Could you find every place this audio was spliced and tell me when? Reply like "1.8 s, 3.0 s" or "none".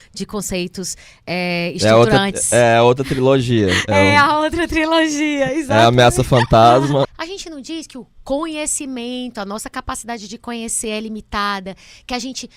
7.0 s